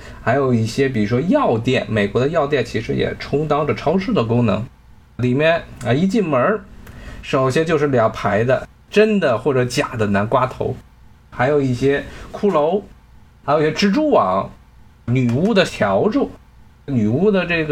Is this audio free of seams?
yes; 0 cuts

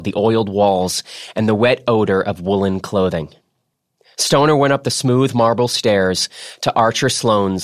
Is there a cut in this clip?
no; 0 cuts

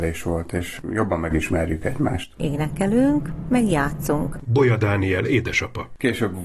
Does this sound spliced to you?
yes; 2 cuts; at 2.4 s, 4.4 s

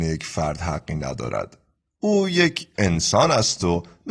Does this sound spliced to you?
no; 0 cuts

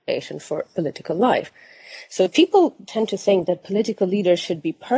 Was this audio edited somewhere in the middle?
no; 0 cuts

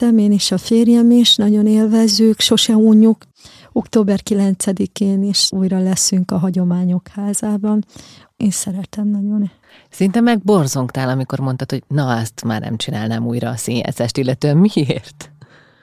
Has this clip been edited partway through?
no; 0 cuts

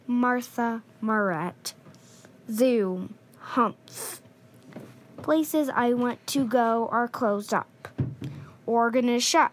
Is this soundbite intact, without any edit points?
yes; 0 cuts

